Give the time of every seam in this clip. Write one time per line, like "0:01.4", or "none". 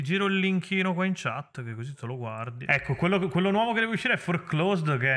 0:02.7